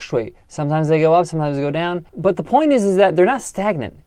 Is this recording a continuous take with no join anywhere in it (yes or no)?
no